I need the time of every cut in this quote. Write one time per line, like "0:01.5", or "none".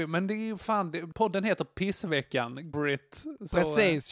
0:01.1
0:02.7

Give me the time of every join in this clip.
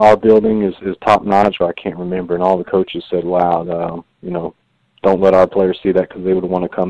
0:01.6
0:03.6

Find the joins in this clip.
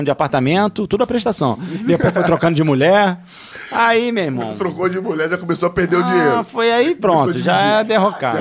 none

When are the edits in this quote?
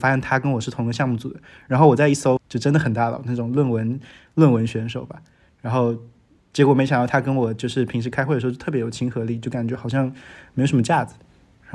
0:02.4

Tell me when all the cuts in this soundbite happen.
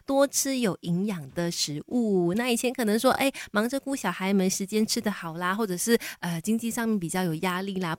none

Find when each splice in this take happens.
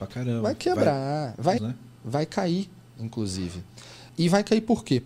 0:01.6

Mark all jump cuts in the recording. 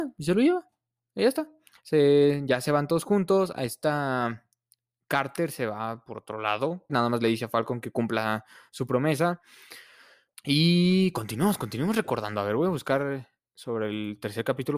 0:06.9
0:10.3

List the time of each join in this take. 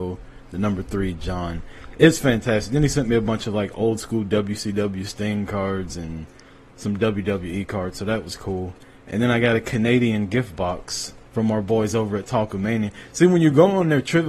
0:11.3

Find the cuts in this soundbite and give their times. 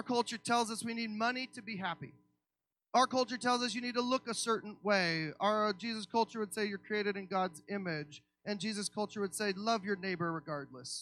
0:02.7
0:08.4

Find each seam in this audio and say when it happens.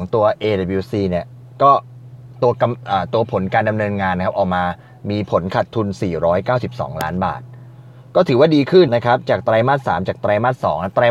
0:08.9

